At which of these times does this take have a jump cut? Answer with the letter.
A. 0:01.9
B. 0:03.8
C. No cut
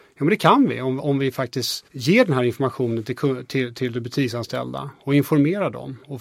A